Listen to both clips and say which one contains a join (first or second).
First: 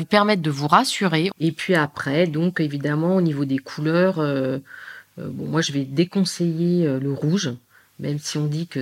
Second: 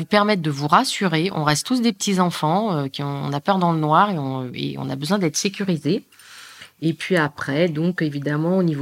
first